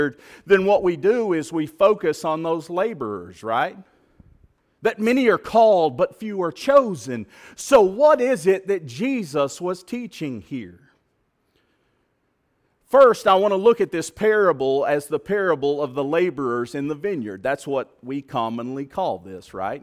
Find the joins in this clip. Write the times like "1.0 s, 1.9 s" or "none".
4.7 s